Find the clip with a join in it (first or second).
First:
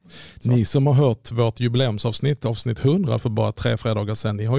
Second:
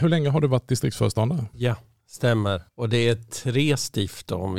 second